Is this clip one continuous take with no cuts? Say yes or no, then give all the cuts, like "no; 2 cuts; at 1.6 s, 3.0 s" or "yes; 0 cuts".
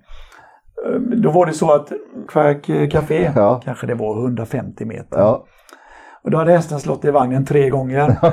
no; 1 cut; at 2.3 s